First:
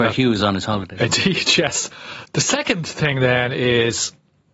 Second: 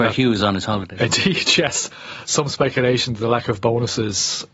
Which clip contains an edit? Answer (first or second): first